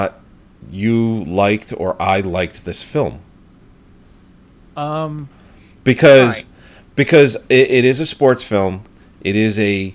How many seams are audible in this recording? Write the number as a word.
zero